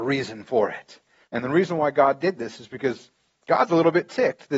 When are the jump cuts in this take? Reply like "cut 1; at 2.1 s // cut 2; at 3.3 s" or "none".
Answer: cut 1; at 1.3 s